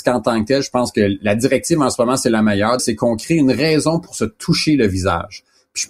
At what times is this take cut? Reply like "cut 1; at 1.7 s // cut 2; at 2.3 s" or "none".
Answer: cut 1; at 2.8 s